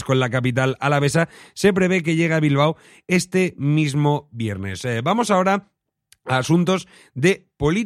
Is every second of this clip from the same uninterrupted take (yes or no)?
yes